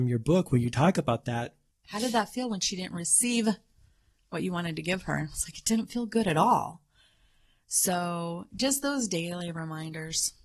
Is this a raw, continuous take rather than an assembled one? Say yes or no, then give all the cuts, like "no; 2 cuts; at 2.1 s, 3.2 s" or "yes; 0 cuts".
no; 1 cut; at 1.7 s